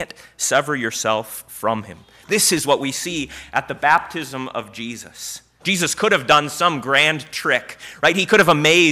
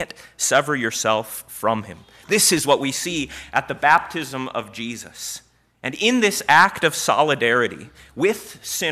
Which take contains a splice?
first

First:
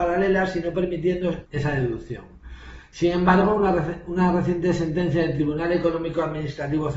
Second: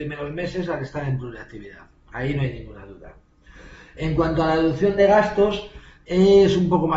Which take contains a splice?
first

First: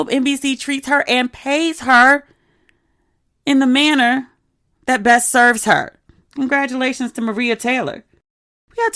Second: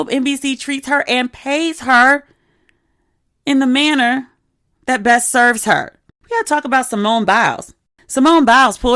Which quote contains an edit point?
second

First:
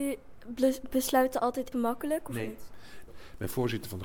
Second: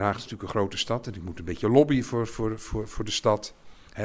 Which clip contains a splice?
first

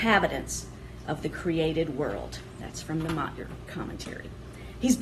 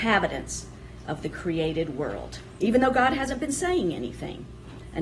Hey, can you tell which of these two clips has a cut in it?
second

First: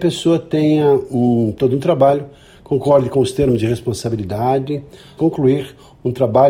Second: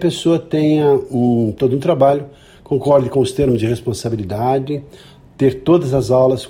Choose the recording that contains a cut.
first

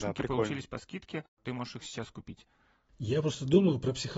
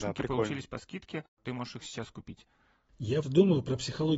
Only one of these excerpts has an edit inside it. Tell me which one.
second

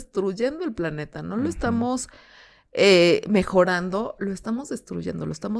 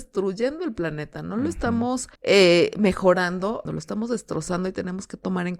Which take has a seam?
second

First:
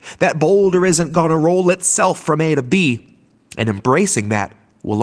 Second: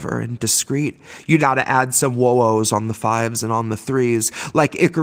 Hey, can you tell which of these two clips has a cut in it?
second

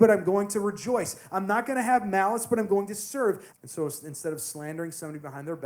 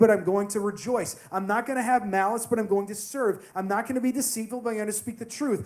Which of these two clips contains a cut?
first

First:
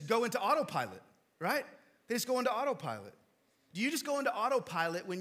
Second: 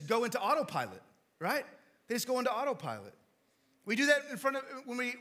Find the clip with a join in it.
first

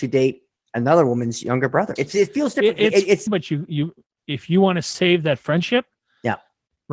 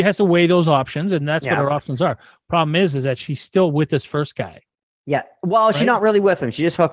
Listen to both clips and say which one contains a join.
first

